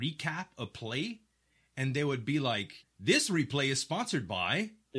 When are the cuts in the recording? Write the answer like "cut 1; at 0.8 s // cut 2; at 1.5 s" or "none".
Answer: cut 1; at 2.8 s